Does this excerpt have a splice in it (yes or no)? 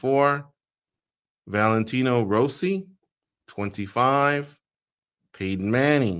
no